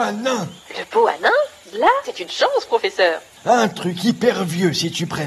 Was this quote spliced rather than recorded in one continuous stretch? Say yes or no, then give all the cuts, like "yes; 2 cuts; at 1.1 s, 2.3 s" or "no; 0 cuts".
yes; 2 cuts; at 2.0 s, 3.4 s